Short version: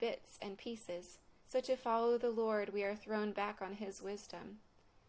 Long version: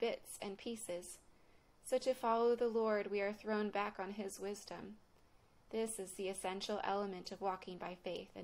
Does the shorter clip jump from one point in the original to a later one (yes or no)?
yes